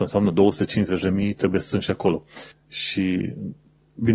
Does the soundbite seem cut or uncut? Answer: cut